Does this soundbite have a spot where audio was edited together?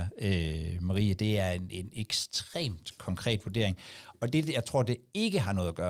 no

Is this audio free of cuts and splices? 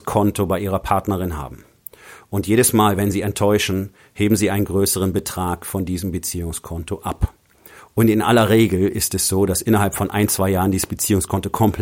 yes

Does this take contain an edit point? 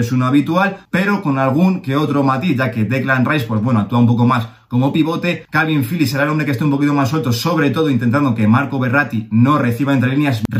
no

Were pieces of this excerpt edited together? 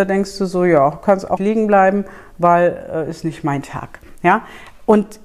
yes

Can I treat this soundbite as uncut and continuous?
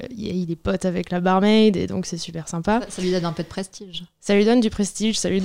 yes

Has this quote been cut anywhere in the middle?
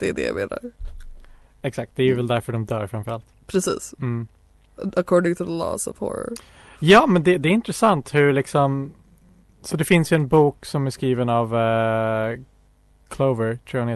no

